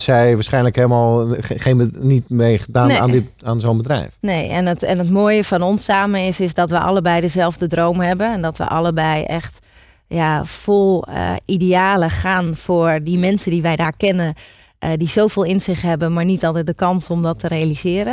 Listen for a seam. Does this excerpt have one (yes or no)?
yes